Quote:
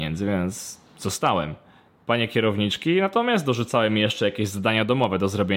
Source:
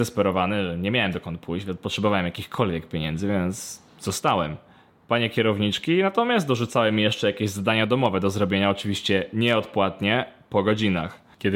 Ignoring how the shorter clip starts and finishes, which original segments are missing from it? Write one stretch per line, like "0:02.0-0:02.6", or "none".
none